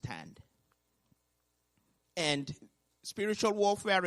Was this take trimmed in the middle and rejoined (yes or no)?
yes